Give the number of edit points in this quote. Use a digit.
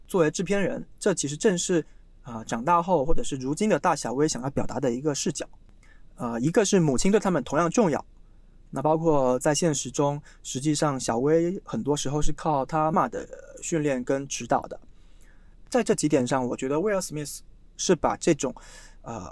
2